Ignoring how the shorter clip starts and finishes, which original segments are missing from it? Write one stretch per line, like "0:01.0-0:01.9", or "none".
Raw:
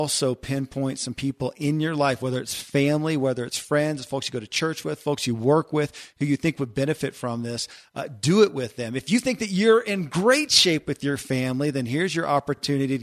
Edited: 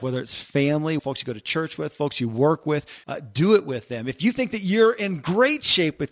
0:03.2-0:04.1
0:06.1-0:07.9